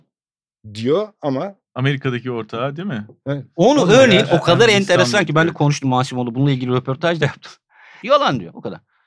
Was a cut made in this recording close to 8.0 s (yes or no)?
yes